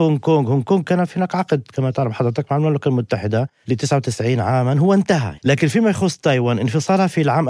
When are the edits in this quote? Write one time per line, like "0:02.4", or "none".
0:05.4